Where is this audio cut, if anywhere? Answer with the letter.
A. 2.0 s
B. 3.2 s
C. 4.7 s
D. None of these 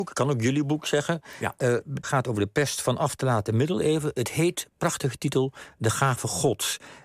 A